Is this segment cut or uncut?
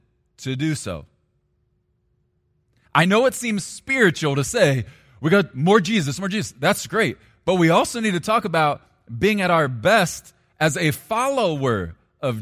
cut